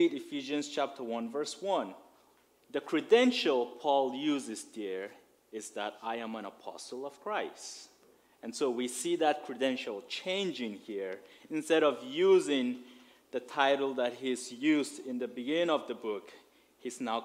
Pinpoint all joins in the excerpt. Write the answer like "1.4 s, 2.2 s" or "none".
none